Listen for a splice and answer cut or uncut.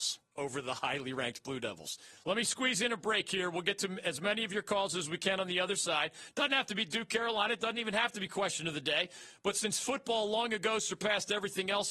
cut